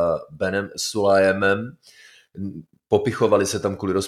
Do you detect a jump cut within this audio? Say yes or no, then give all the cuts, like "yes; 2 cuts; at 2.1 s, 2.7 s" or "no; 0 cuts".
no; 0 cuts